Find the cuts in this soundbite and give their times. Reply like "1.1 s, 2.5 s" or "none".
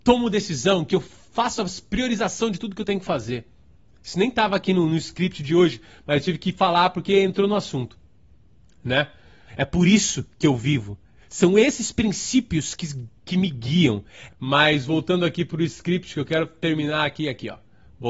9.5 s, 14.3 s